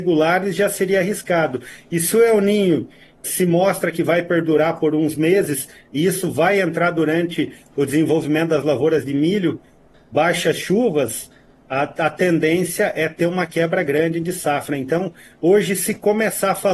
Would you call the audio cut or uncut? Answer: cut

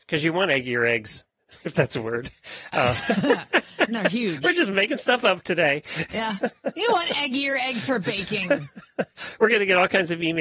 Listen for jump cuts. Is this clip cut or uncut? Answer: uncut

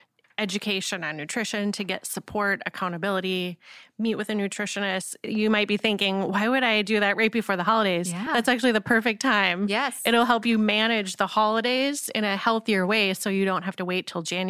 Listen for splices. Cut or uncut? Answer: uncut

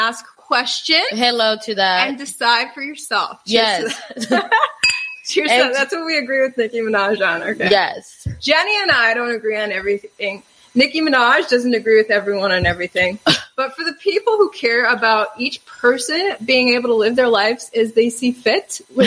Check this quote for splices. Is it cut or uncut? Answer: uncut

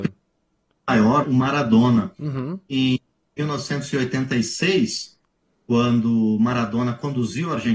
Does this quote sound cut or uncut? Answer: cut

